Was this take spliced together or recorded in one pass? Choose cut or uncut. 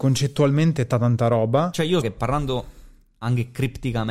cut